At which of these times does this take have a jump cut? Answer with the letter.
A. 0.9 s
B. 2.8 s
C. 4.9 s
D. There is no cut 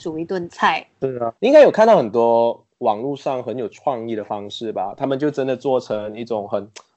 D